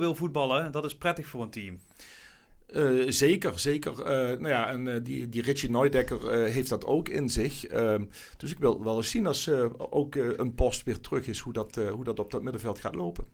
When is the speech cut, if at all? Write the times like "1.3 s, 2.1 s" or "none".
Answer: none